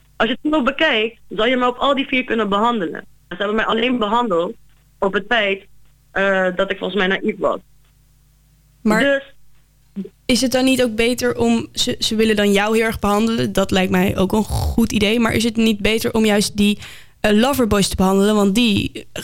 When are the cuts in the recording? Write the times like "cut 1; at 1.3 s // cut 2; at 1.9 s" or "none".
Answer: cut 1; at 3.3 s